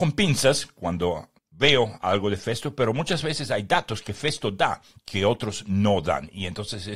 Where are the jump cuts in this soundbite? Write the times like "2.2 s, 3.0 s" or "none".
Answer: 1.4 s